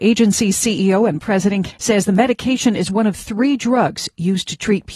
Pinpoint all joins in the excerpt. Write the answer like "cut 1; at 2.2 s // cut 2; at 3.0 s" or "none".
cut 1; at 1.7 s